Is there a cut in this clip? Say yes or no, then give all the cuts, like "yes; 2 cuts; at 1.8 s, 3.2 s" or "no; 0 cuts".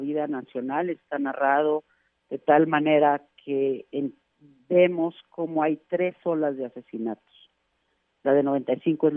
no; 0 cuts